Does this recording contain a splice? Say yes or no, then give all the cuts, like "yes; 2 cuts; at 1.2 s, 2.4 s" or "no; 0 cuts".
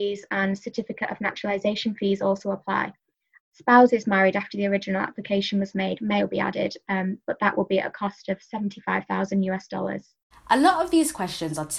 yes; 3 cuts; at 3.4 s, 6.2 s, 10.3 s